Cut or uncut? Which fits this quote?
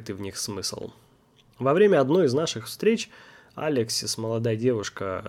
uncut